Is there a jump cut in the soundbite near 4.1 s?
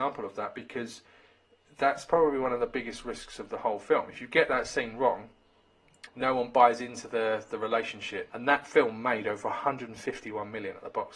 no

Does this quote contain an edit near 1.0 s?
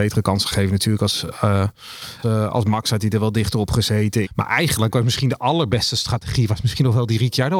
no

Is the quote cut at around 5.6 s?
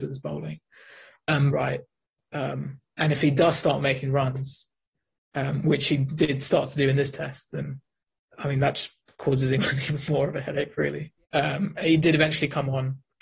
no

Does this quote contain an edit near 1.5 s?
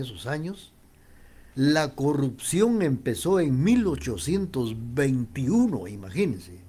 yes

